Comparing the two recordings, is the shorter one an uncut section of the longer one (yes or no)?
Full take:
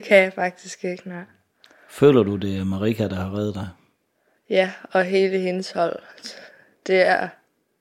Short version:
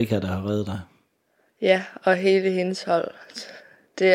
yes